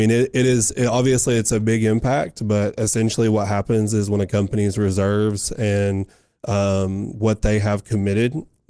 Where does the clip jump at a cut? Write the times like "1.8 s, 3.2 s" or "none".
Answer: none